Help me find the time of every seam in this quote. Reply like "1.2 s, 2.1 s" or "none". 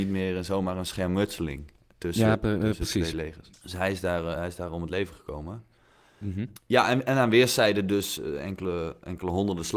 8.2 s